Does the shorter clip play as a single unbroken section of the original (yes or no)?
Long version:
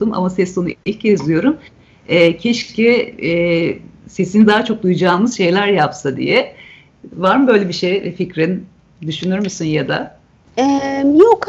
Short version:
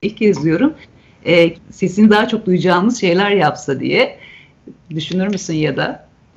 no